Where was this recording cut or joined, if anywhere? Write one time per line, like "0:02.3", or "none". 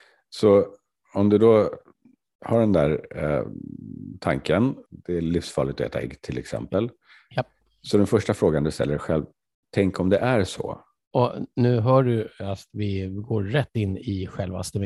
0:11.0